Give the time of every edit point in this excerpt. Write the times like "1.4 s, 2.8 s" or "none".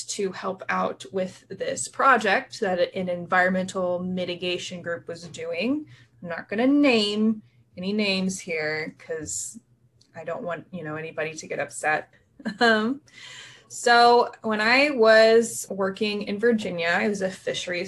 12.1 s, 15.7 s